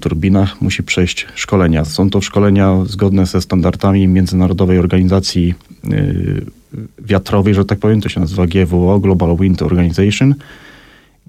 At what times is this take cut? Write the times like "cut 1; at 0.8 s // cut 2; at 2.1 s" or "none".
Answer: none